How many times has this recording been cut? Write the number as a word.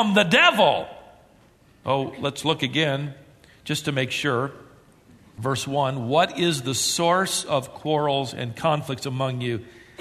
zero